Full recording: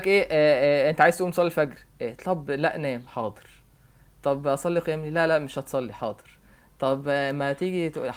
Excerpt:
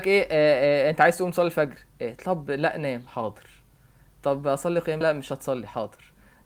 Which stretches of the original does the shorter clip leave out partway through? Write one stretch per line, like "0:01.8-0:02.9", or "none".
0:05.0-0:05.3